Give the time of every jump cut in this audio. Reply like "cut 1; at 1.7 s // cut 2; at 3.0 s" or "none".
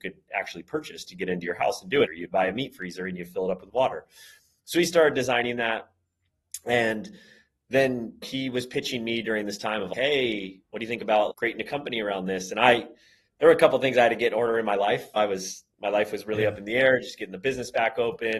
cut 1; at 2.1 s

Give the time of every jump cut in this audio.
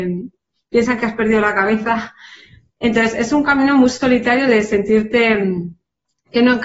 none

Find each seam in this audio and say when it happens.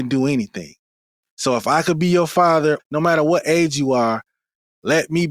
cut 1; at 2.8 s

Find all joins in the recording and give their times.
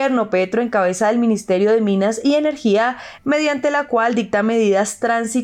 cut 1; at 3.2 s

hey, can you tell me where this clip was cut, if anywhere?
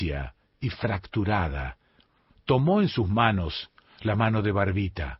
cut 1; at 2.3 s

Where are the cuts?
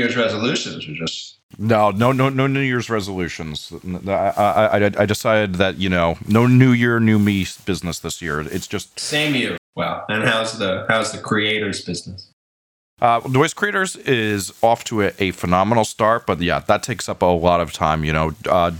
cut 1; at 9.6 s

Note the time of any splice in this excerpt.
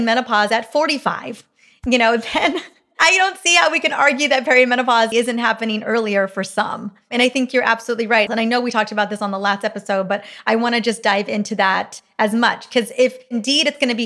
cut 1; at 5.1 s // cut 2; at 8.3 s

